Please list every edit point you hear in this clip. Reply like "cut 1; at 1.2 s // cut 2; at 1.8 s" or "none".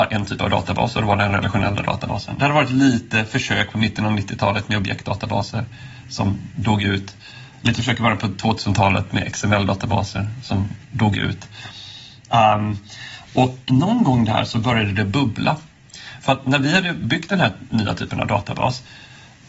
cut 1; at 12.3 s // cut 2; at 13.7 s